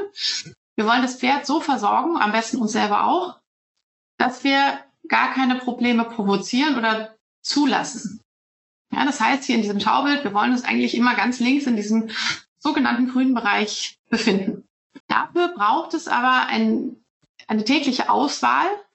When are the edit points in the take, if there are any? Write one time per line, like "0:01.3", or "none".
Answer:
0:15.0